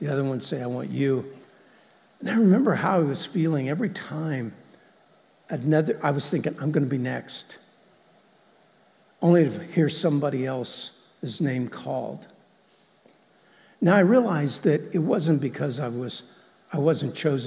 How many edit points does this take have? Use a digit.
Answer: 0